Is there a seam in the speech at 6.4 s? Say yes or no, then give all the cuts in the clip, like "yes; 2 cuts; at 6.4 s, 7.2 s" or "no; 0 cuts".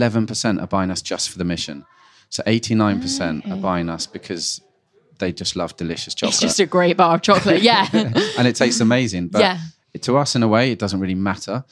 no; 0 cuts